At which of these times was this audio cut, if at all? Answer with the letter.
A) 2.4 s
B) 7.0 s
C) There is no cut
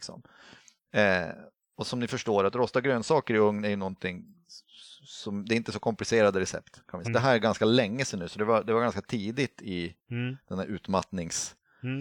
B